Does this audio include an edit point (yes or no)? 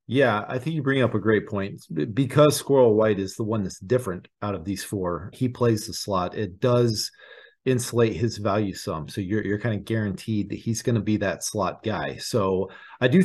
yes